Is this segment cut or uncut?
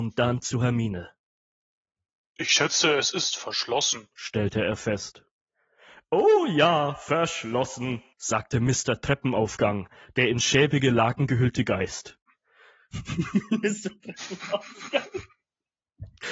uncut